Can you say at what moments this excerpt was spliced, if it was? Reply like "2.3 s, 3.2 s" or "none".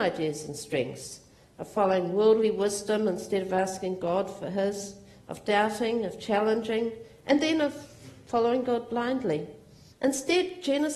9.9 s

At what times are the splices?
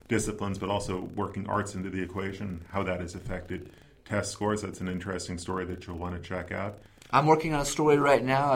none

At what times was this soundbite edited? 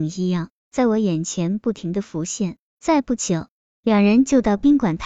2.7 s

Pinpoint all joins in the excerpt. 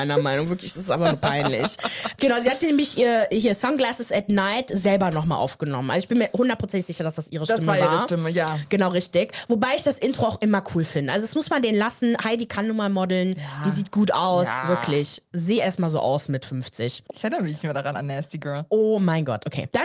17.1 s

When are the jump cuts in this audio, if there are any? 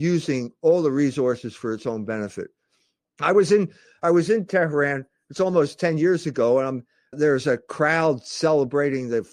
3.0 s, 7.1 s

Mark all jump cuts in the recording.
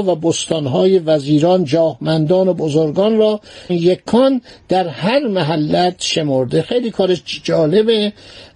3.7 s

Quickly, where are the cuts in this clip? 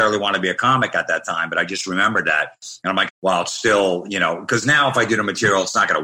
3.1 s

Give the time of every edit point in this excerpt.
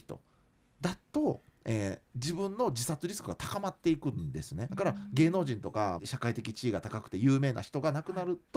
4.7 s, 6.0 s

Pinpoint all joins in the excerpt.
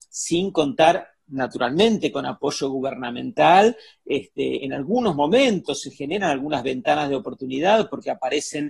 none

